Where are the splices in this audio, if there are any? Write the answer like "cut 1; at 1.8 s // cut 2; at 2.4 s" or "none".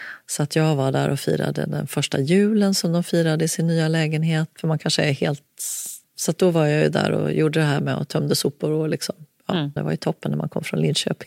cut 1; at 4.5 s // cut 2; at 6.0 s // cut 3; at 9.8 s